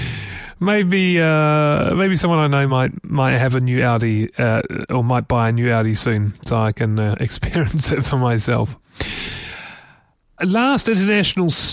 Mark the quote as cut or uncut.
uncut